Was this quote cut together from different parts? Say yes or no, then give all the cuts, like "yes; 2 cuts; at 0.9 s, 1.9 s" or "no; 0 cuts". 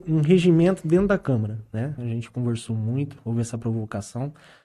yes; 1 cut; at 2.0 s